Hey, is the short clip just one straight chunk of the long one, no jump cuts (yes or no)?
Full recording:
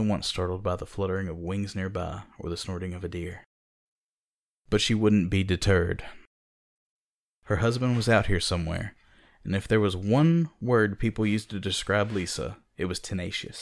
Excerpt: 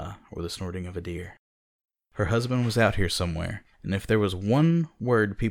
no